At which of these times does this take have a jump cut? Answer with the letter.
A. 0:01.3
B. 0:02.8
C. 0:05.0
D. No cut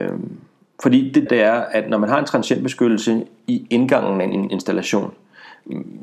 A